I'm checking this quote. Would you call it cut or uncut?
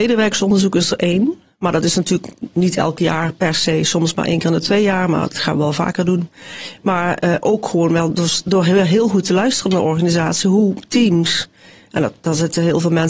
uncut